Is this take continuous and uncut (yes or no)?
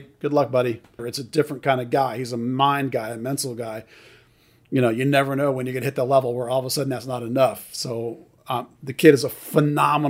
no